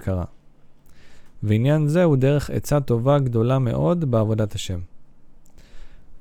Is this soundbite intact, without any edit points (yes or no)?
no